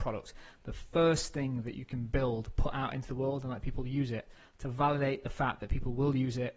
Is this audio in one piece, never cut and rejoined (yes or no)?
yes